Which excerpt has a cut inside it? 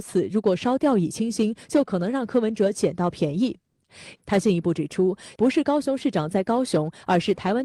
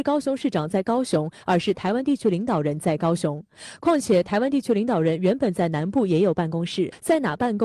first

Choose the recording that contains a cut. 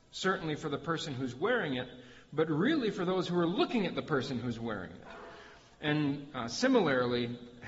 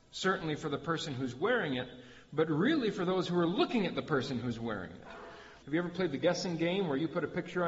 second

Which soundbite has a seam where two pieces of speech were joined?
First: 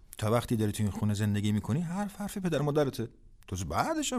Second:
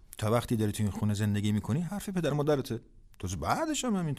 second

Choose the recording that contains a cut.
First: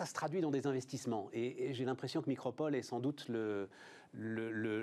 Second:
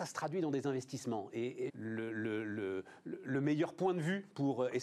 second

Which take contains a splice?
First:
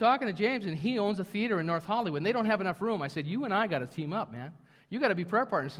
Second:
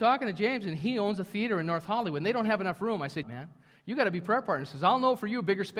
second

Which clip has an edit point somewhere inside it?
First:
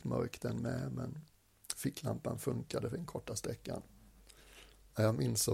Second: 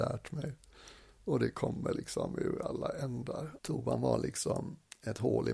second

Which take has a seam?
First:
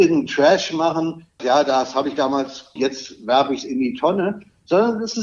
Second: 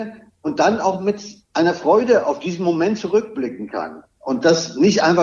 first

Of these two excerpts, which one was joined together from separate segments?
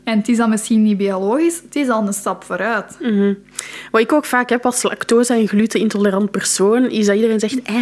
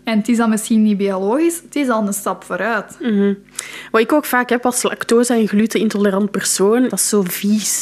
second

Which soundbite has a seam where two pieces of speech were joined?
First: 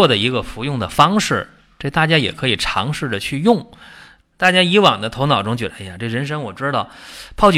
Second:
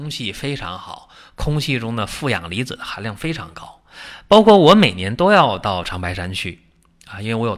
first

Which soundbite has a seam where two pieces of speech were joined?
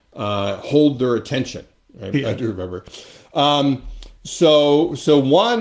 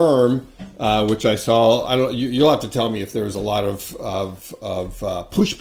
first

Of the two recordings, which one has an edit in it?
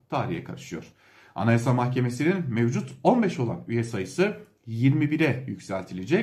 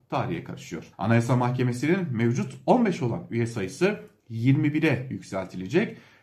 second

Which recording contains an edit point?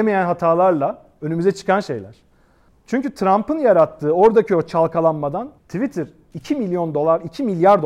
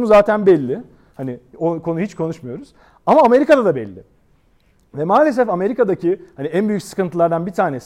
first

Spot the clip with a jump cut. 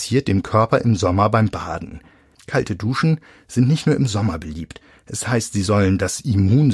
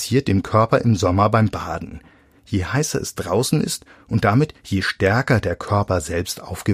first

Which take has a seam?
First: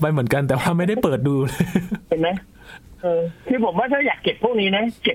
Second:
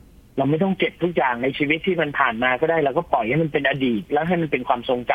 first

